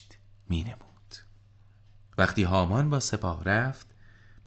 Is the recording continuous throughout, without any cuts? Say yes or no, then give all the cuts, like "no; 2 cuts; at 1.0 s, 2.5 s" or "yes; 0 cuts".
yes; 0 cuts